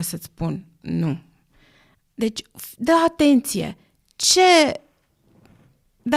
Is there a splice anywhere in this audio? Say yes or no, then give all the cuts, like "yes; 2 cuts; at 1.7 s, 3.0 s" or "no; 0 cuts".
no; 0 cuts